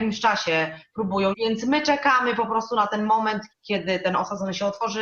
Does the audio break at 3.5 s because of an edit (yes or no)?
yes